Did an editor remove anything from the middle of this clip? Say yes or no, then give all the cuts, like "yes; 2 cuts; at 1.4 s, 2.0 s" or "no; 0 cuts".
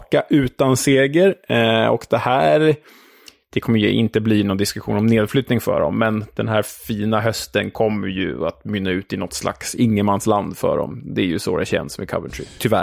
no; 0 cuts